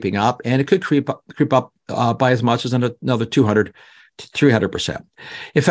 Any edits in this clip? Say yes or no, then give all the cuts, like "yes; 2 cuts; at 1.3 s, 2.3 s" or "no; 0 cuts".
no; 0 cuts